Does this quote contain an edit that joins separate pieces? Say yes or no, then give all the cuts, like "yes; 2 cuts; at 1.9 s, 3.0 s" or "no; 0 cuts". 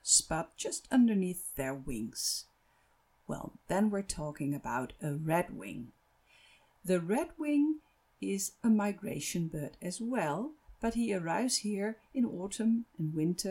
no; 0 cuts